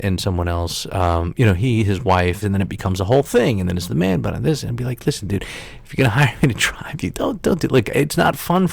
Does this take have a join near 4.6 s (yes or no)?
no